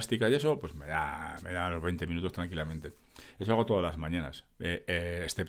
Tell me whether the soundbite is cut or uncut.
uncut